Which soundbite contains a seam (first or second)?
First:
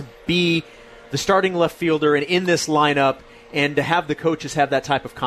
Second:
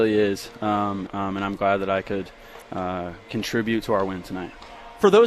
second